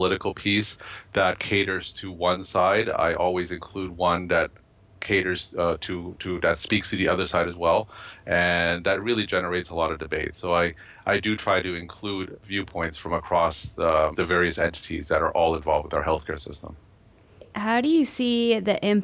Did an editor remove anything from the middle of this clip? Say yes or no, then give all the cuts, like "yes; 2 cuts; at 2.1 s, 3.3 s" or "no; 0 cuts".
yes; 1 cut; at 14.1 s